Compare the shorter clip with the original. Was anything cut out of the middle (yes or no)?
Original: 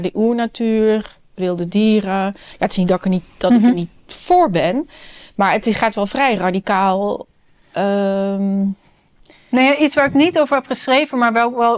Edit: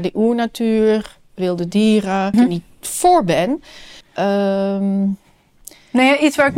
yes